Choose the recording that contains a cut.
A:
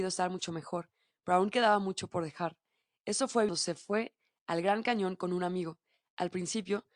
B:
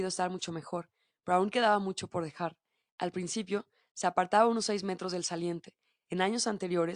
B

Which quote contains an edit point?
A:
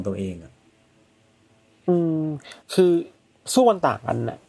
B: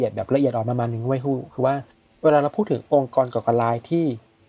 A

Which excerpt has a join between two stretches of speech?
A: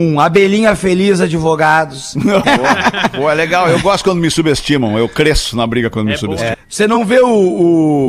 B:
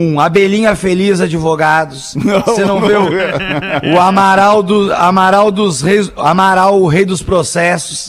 A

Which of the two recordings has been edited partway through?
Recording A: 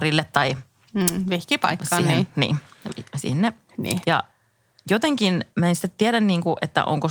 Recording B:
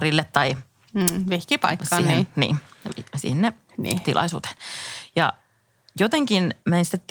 A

